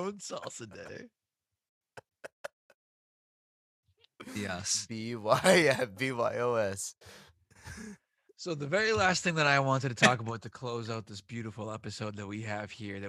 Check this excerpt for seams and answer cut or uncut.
uncut